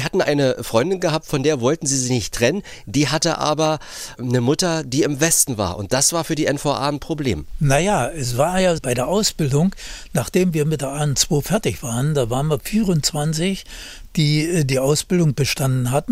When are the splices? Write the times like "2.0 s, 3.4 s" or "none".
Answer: 8.8 s